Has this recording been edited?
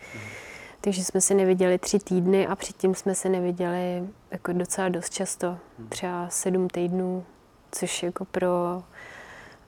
no; 0 cuts

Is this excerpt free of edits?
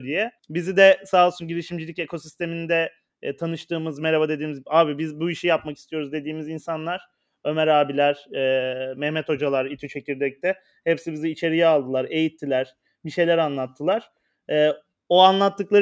yes; 0 cuts

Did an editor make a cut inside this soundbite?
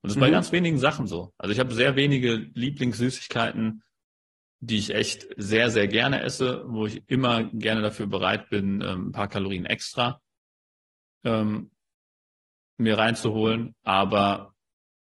no; 0 cuts

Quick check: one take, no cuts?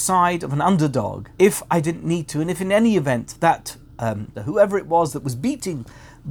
no; 2 cuts; at 1.3 s, 4.3 s

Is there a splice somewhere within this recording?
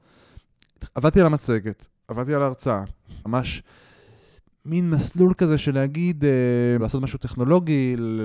yes; 2 cuts; at 3.2 s, 6.8 s

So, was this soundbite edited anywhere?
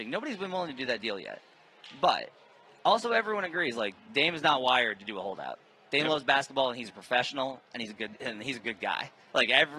no; 0 cuts

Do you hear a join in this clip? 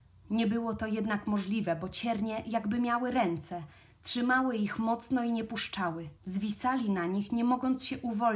yes; 1 cut; at 6.2 s

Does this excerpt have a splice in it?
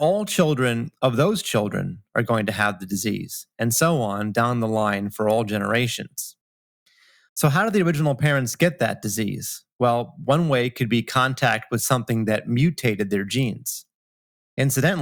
no; 0 cuts

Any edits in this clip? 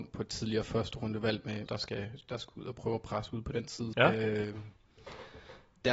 yes; 2 cuts; at 1.7 s, 3.9 s

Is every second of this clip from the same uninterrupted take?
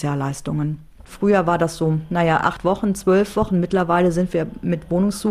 yes; 0 cuts

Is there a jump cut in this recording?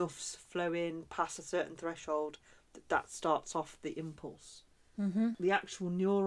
no; 0 cuts

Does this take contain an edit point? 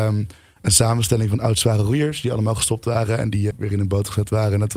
yes; 1 cut; at 3.5 s

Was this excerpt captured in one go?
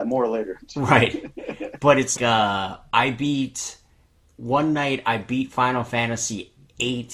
no; 2 cuts; at 2.2 s, 4.2 s

